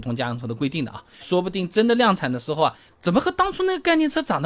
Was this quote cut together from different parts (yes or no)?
yes